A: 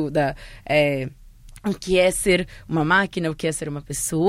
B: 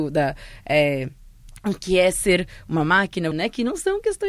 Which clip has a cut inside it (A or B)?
B